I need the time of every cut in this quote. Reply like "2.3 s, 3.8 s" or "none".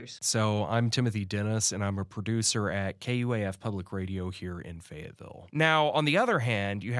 5.5 s